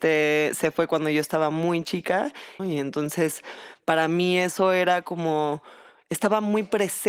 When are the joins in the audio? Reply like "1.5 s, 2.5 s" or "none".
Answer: 2.6 s